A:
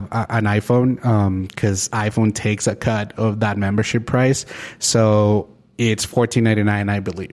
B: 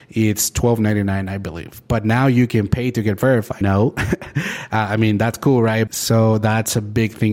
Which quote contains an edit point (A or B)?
B